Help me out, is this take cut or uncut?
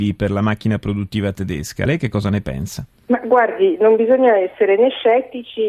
uncut